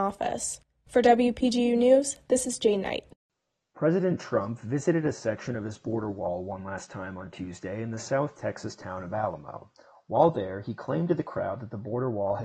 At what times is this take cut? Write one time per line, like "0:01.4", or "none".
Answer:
none